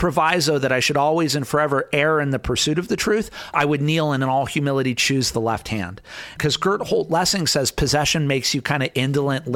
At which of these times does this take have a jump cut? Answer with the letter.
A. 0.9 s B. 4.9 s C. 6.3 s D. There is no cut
C